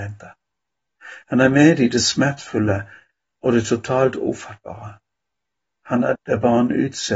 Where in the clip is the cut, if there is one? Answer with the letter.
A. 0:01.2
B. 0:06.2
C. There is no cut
B